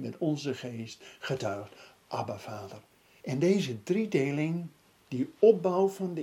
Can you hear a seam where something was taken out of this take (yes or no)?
yes